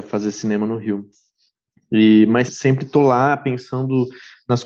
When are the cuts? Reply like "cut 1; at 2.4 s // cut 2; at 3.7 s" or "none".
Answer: cut 1; at 2.5 s